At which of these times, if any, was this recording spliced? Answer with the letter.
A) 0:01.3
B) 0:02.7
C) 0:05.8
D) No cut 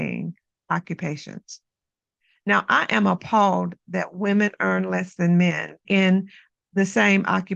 C